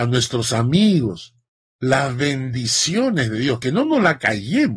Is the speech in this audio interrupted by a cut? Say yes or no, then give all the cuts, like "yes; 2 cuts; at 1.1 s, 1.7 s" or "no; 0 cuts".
no; 0 cuts